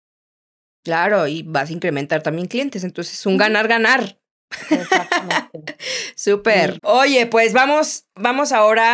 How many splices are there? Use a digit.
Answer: 1